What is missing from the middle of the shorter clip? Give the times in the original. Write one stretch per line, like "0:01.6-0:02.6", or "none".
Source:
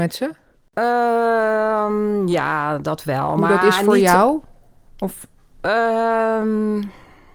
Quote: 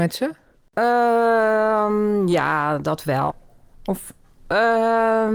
0:03.3-0:04.4